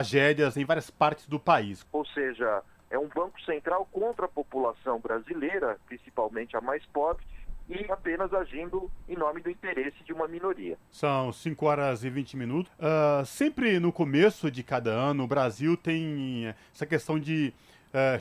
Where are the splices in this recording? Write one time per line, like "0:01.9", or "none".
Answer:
0:01.8
0:10.9
0:12.7